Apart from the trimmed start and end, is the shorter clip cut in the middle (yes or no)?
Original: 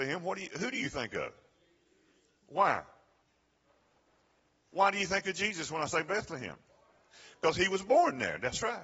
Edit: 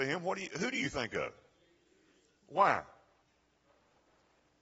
no